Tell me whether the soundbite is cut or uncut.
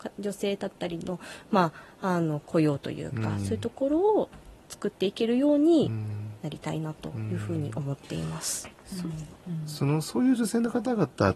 uncut